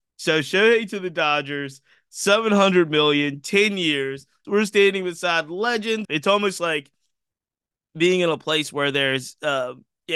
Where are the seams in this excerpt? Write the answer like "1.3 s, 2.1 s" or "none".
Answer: 4.4 s, 6.0 s